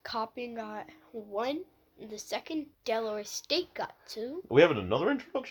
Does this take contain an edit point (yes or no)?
yes